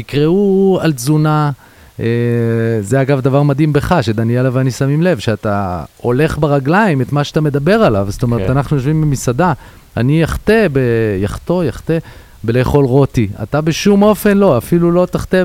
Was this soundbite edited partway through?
no; 0 cuts

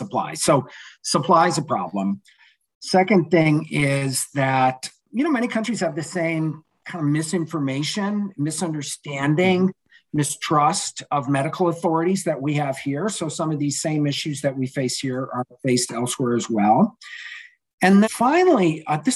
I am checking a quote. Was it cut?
yes; 1 cut; at 18.0 s

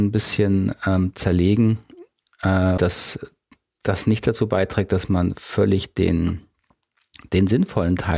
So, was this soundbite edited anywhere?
yes; 1 cut; at 2.8 s

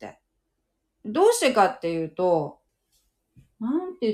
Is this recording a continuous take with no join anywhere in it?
no; 1 cut; at 1.0 s

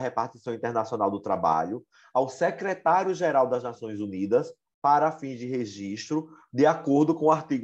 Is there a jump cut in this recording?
no; 0 cuts

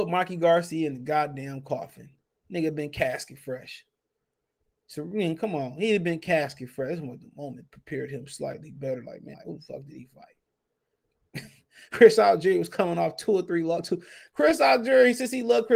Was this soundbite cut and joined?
yes; 1 cut; at 9.3 s

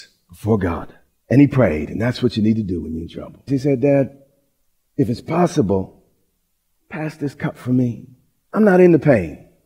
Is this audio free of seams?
no; 1 cut; at 3.5 s

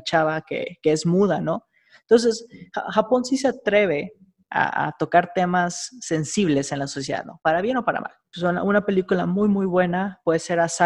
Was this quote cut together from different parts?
yes; 1 cut; at 8.3 s

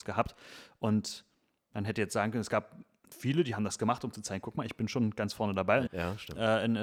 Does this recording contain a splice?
yes; 1 cut; at 5.9 s

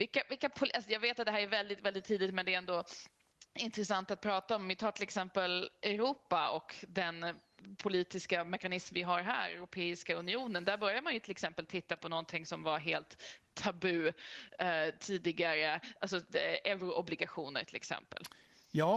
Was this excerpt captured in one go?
yes; 0 cuts

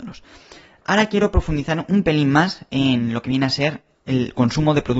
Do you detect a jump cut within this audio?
no; 0 cuts

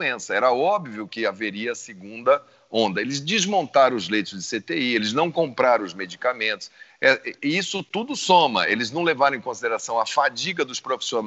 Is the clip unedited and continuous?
no; 1 cut; at 7.4 s

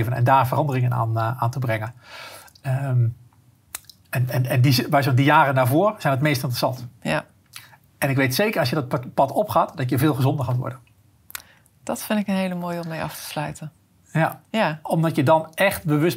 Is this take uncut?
yes; 0 cuts

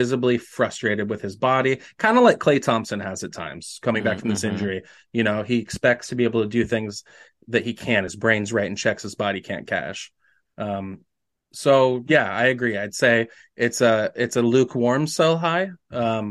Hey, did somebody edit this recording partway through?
no; 0 cuts

